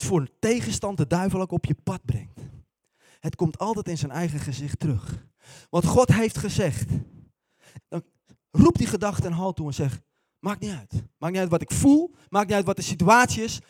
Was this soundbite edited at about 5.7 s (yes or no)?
no